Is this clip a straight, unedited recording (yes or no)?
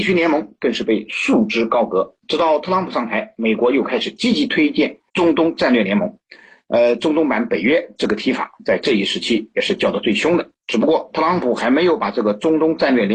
no